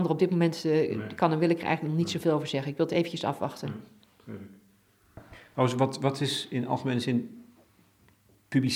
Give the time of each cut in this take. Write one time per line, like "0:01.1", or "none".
none